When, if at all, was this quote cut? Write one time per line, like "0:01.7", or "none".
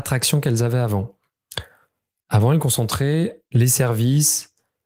none